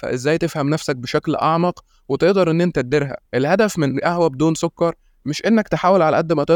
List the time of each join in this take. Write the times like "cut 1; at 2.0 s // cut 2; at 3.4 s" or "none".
cut 1; at 3.3 s